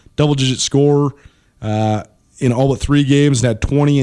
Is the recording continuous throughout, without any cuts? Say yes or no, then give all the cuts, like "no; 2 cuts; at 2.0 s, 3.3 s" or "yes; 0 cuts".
yes; 0 cuts